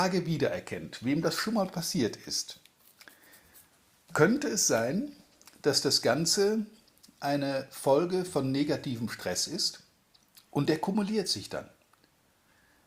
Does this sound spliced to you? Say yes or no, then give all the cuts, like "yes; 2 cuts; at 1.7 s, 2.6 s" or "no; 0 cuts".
no; 0 cuts